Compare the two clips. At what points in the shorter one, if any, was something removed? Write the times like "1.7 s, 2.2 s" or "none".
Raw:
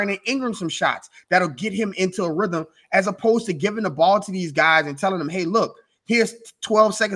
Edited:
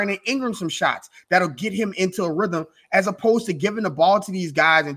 none